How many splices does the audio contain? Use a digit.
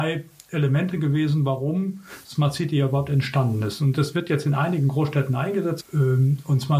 1